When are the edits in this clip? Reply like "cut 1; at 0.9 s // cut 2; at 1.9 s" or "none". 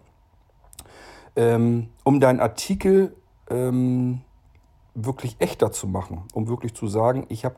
none